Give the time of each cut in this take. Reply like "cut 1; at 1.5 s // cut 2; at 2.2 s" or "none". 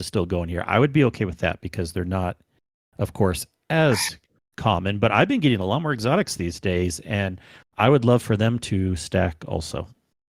none